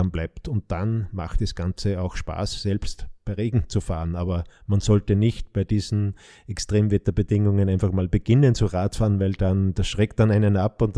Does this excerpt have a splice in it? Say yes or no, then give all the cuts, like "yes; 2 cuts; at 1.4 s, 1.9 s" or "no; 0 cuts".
no; 0 cuts